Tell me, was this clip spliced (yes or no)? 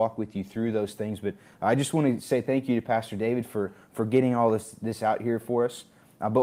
no